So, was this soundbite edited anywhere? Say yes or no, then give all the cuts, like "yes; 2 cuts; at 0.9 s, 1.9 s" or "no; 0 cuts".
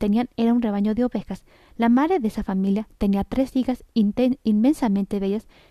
no; 0 cuts